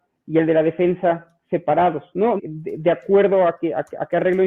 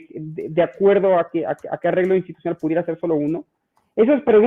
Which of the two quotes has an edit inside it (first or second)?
first